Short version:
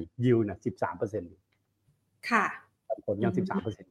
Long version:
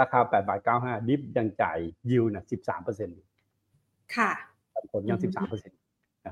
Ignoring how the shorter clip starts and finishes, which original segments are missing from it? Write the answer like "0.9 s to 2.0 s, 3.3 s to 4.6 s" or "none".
none